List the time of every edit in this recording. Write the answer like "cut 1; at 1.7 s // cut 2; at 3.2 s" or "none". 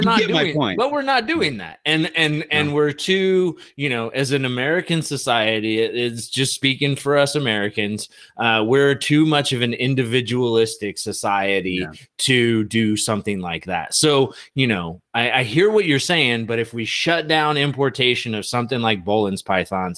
none